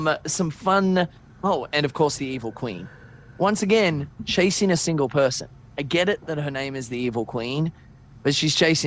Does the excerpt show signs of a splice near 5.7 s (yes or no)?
no